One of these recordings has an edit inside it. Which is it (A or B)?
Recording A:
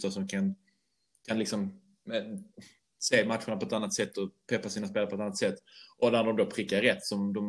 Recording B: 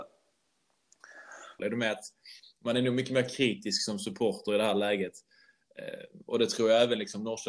B